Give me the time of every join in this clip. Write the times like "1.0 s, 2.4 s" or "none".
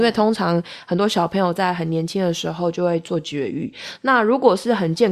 4.0 s